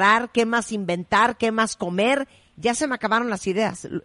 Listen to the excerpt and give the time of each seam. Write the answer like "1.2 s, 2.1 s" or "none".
none